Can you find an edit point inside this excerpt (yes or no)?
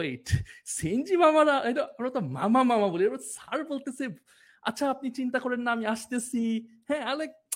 no